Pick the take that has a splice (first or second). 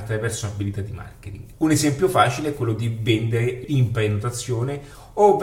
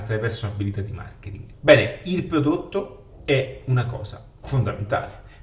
second